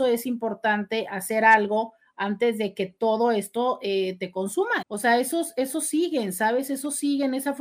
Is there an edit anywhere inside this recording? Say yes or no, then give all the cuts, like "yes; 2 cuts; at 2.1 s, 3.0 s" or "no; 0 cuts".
yes; 1 cut; at 4.8 s